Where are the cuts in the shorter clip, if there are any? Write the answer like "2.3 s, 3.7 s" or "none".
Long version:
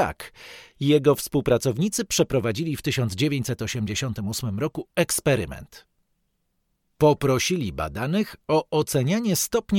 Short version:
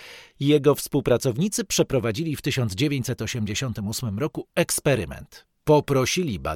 5.5 s